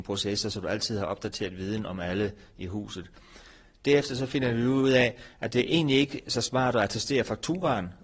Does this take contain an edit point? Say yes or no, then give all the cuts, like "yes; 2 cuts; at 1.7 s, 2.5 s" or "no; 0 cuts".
no; 0 cuts